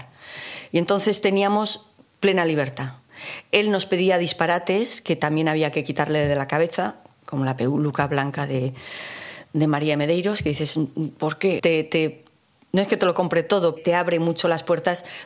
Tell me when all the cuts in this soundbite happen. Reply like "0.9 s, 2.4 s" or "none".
11.6 s, 13.8 s